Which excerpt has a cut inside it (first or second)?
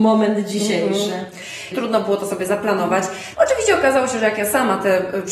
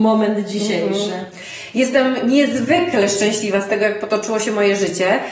first